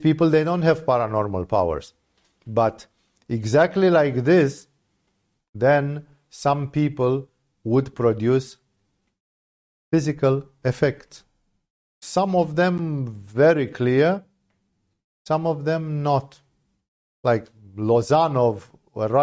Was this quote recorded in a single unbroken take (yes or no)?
yes